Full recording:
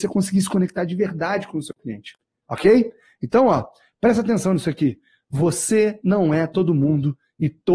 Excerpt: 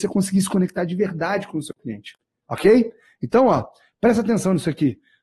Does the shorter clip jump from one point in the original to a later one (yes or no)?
no